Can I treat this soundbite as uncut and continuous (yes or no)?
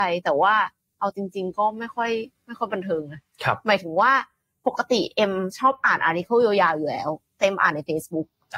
yes